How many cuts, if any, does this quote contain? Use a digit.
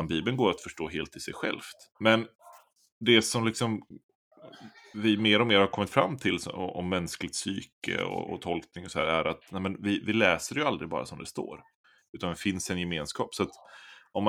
1